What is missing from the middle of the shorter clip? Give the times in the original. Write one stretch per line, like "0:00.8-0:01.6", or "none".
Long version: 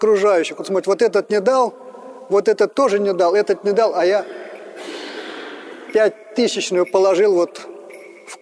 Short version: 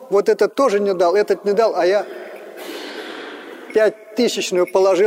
none